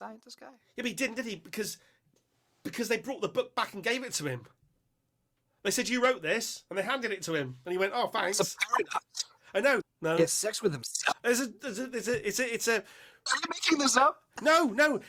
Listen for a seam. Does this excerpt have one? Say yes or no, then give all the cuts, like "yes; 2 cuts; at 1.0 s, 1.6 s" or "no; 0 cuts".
yes; 2 cuts; at 9.8 s, 11.1 s